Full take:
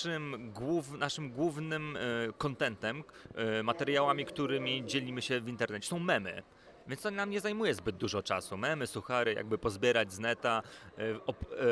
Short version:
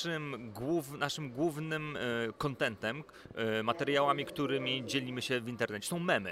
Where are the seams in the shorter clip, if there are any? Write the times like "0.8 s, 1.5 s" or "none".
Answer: none